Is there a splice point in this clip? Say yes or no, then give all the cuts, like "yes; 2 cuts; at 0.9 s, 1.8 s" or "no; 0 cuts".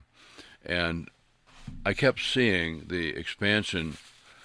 no; 0 cuts